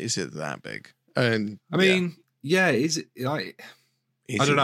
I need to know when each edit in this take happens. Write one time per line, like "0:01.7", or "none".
none